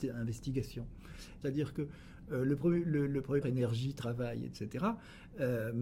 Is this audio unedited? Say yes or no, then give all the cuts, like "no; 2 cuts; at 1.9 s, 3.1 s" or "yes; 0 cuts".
no; 2 cuts; at 1.4 s, 3.4 s